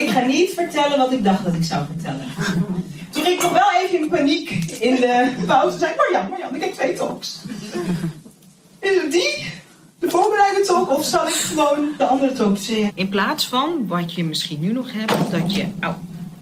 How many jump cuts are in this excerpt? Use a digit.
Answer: 2